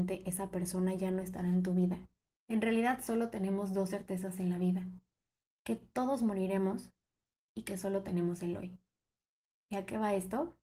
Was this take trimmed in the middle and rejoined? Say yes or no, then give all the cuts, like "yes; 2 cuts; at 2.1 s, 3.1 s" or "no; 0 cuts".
yes; 1 cut; at 2.4 s